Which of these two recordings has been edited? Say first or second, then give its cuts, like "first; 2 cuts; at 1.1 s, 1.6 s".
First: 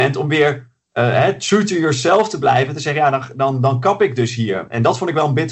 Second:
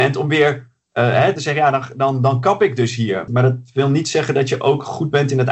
second; 2 cuts; at 1.4 s, 3.3 s